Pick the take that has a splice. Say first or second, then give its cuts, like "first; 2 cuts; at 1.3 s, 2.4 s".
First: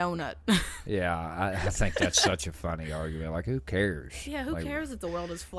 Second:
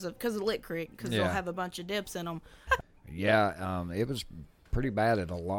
second; 1 cut; at 2.7 s